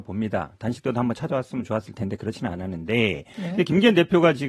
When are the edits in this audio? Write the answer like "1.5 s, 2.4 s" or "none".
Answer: none